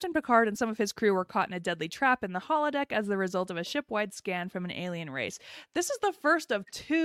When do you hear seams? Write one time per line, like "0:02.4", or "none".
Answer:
none